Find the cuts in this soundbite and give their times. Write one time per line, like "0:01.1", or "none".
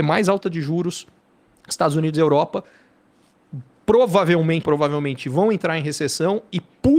0:04.6

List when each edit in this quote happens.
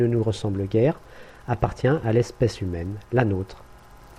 none

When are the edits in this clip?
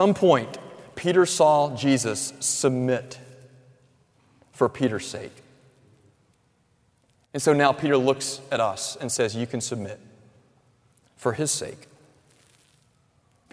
none

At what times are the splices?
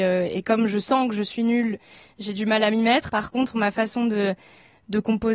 0:03.1

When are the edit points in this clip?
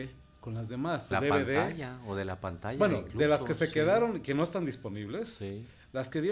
0:01.1

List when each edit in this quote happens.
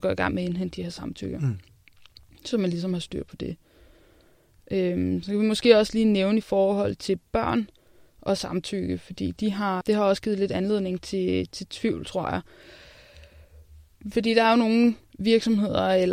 0:09.8

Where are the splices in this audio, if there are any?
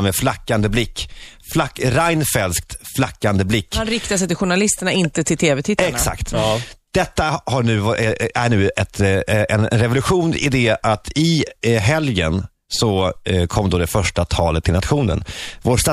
none

